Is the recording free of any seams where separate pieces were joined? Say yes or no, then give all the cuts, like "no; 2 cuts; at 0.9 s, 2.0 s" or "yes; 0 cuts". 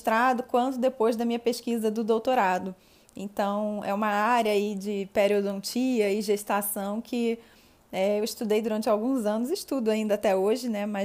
yes; 0 cuts